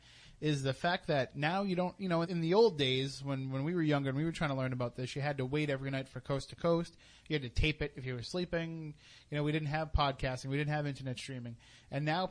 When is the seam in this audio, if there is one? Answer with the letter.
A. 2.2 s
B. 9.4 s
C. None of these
A